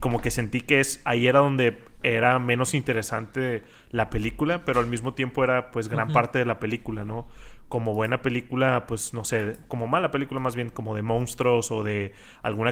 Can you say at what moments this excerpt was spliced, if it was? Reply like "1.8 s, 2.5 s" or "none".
none